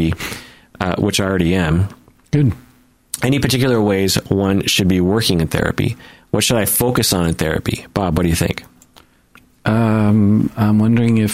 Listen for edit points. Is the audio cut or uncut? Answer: uncut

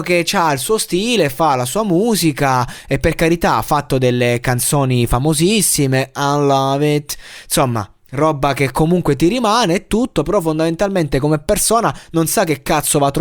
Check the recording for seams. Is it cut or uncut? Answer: uncut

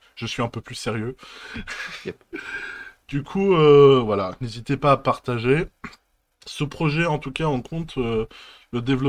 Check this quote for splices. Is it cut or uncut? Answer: uncut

